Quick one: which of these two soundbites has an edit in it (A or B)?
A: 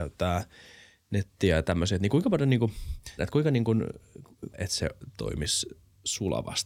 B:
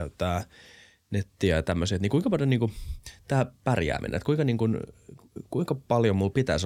A